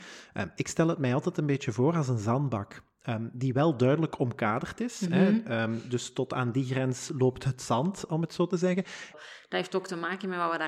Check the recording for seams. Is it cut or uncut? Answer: cut